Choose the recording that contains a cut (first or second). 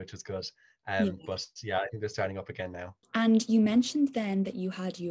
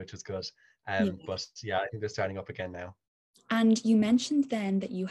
first